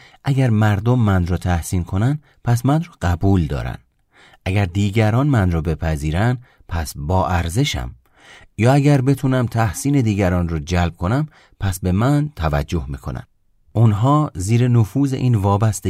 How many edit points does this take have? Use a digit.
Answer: 0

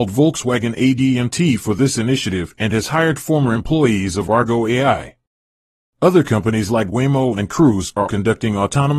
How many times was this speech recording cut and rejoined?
1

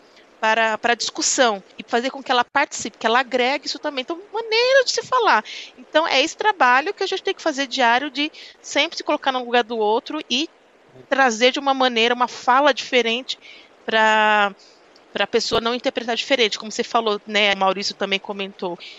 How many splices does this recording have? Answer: 2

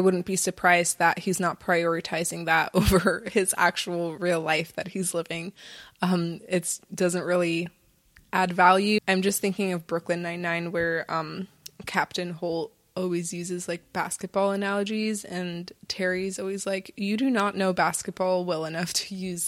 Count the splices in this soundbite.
1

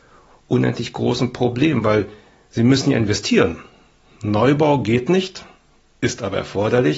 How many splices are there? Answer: 0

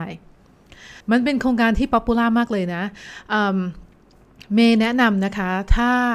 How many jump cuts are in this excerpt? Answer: 1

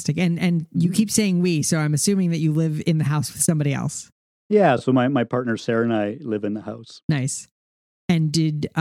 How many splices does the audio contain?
0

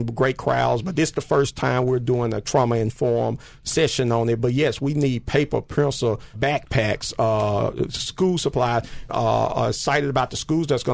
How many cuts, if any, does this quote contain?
2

